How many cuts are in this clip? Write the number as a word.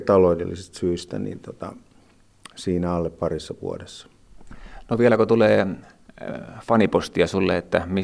zero